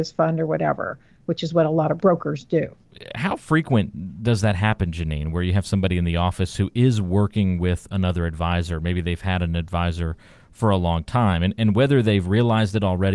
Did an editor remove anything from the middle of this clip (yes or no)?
no